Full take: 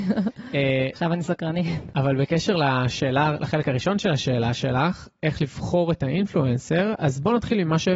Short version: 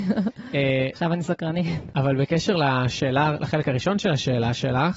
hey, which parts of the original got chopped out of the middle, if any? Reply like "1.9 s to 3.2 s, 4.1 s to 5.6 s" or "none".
none